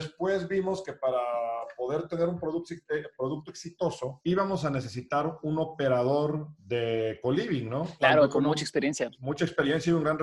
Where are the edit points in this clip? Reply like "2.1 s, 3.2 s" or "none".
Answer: 8.0 s